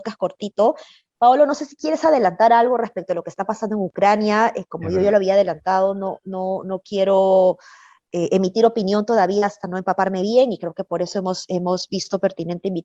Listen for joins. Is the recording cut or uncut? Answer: uncut